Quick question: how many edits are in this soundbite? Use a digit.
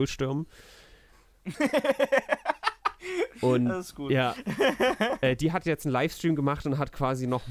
0